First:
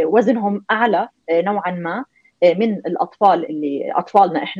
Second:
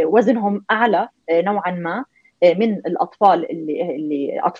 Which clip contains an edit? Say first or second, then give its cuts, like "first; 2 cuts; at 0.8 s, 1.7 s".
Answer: first; 1 cut; at 3.5 s